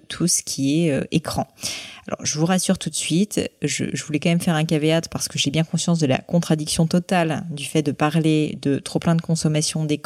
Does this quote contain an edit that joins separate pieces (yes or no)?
no